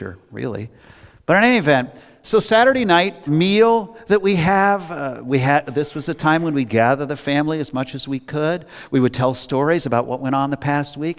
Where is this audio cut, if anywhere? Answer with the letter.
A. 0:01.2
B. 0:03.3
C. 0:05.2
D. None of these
B